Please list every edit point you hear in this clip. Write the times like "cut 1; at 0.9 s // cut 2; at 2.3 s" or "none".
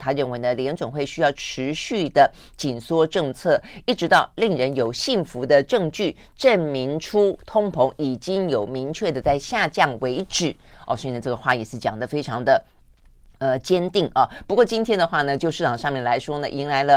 none